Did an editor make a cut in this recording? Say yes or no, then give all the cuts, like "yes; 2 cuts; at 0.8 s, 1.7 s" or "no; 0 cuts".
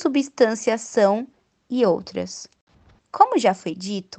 yes; 1 cut; at 3.0 s